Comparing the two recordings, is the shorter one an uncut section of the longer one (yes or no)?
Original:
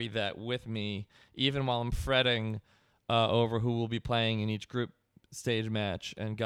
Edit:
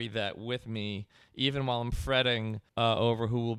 no